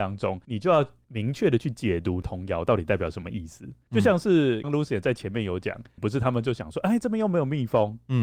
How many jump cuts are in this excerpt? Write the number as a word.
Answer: two